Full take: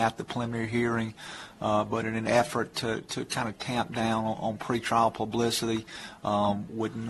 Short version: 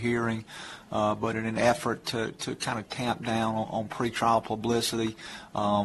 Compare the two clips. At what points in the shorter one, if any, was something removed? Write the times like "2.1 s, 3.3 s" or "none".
none